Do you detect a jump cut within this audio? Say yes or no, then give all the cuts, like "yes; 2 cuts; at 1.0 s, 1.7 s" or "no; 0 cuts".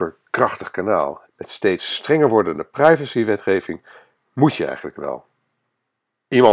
yes; 1 cut; at 1.3 s